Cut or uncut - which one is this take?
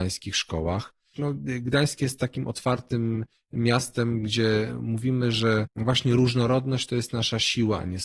cut